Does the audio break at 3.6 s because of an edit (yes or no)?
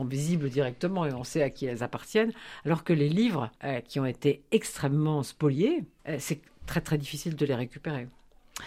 yes